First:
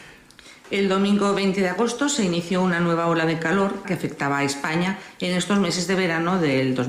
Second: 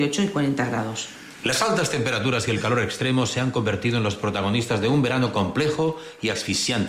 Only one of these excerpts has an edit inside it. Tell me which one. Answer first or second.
first